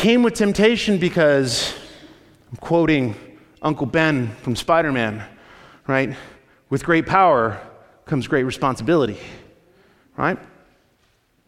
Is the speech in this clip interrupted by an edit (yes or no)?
no